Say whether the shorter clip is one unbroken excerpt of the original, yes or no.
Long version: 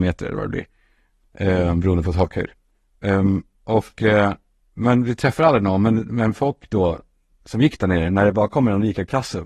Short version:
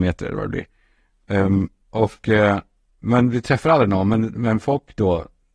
no